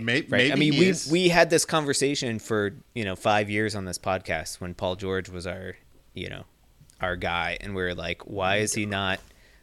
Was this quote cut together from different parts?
no; 0 cuts

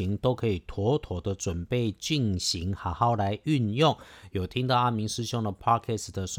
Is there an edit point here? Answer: no; 0 cuts

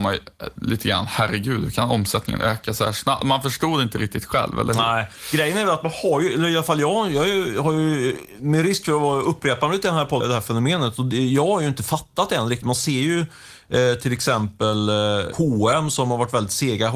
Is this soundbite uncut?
no; 2 cuts; at 10.2 s, 12.6 s

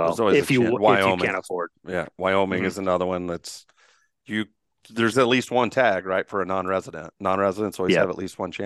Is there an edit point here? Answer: yes; 1 cut; at 5.1 s

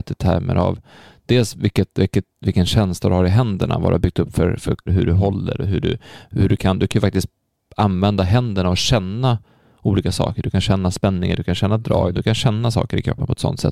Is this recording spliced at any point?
yes; 2 cuts; at 4.9 s, 12.1 s

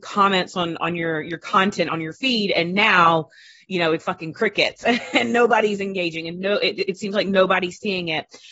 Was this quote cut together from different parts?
yes; 1 cut; at 4.0 s

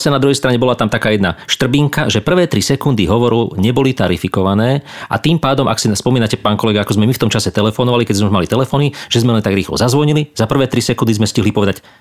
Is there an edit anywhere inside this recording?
no; 0 cuts

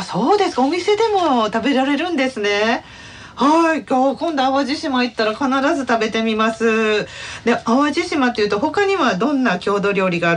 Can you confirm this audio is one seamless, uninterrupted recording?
yes; 0 cuts

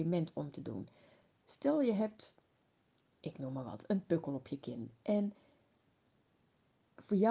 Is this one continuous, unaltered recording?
yes; 0 cuts

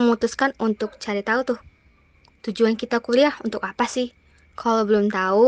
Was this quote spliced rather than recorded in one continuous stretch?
no; 0 cuts

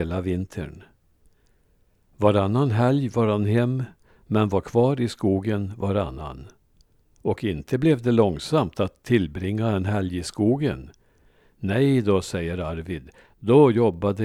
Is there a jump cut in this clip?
no; 0 cuts

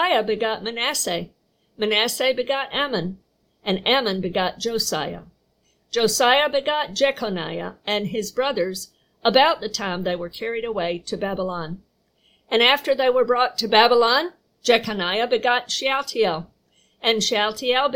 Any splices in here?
no; 0 cuts

